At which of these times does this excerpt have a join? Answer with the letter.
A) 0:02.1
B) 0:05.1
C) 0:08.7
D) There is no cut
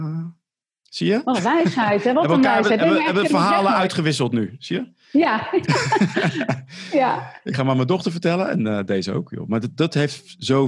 D